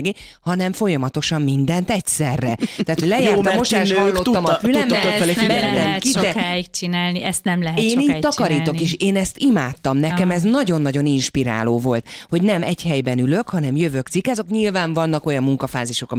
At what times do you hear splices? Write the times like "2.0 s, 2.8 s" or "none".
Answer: 12.0 s, 14.0 s